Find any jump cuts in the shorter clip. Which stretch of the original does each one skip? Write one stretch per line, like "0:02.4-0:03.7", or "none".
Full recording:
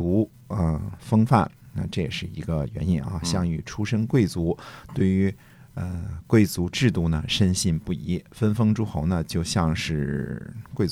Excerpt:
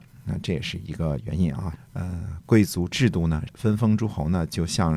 0:03.2-0:05.5
0:07.3-0:08.2